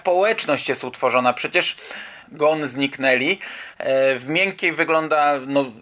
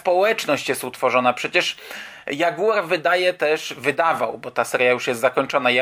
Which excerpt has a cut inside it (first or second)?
first